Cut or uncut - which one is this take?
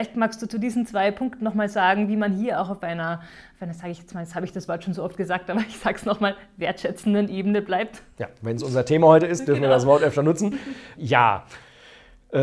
cut